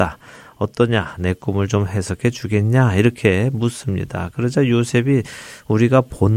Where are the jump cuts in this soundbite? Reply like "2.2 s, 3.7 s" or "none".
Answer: none